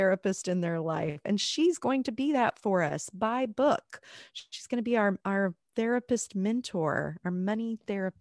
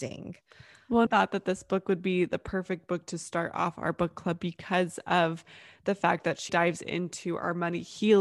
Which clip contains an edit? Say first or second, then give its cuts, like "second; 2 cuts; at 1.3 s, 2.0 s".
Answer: second; 2 cuts; at 1.1 s, 6.5 s